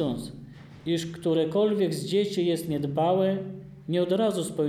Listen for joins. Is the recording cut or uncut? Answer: uncut